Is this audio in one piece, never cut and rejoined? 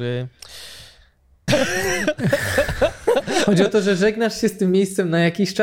no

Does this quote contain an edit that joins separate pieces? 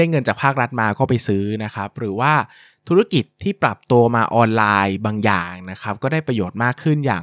no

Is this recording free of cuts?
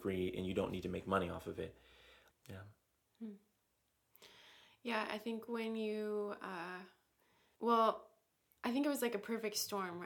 no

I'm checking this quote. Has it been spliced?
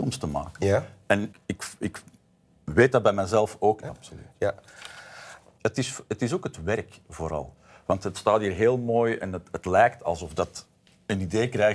yes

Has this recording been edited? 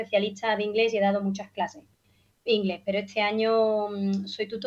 no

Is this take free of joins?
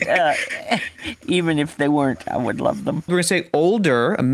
no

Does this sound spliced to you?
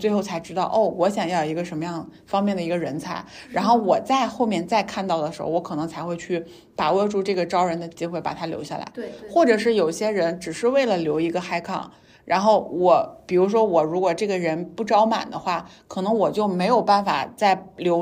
no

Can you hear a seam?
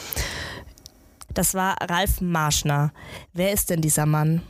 yes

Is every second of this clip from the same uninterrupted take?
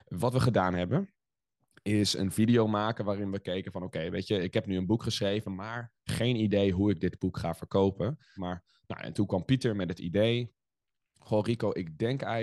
no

